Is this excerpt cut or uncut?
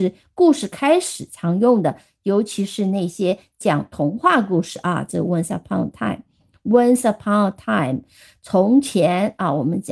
cut